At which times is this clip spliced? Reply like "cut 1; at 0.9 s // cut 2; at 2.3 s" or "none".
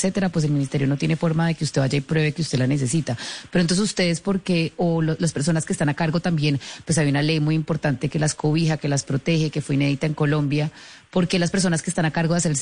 none